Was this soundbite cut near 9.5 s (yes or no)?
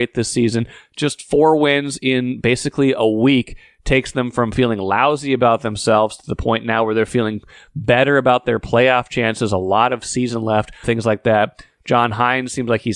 no